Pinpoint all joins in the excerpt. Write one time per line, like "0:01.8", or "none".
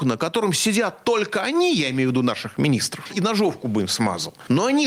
0:03.1